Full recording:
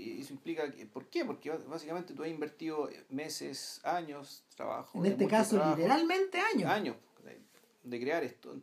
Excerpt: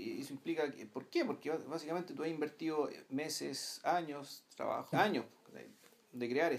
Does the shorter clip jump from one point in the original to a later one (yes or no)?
yes